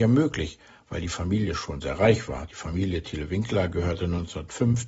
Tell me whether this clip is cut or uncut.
uncut